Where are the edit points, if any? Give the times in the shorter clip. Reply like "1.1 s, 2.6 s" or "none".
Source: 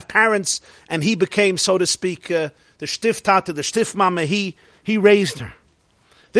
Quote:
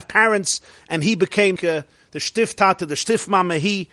1.6 s